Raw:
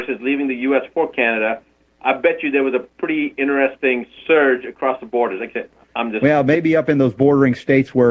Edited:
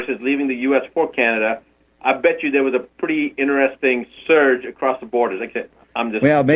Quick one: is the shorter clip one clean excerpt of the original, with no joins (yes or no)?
yes